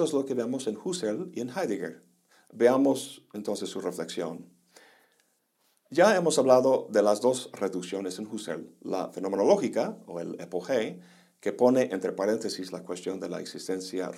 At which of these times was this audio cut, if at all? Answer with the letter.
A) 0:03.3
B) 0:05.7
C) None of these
C